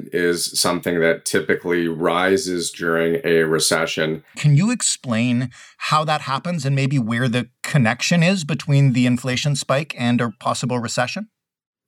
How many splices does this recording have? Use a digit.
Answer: 1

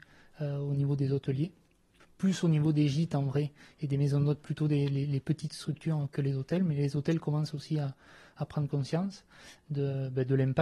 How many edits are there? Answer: 0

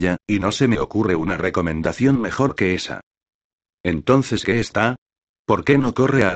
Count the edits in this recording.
1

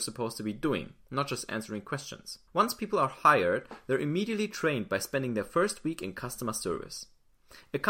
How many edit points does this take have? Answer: 1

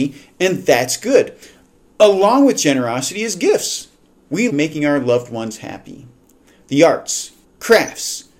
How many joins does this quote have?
2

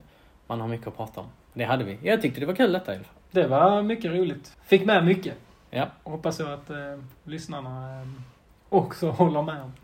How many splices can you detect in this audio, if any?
1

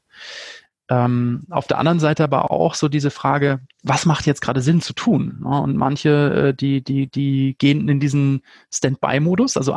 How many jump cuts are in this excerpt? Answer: 1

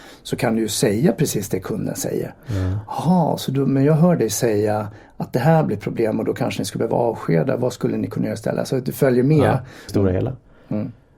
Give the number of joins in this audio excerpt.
1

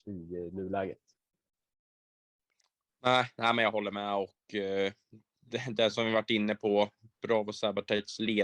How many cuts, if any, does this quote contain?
0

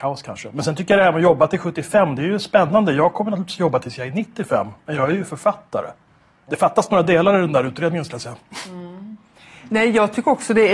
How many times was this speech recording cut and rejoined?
1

